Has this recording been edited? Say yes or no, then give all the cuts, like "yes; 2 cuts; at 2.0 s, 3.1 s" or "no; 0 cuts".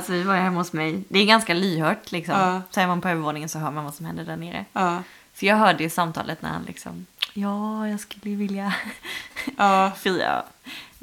no; 0 cuts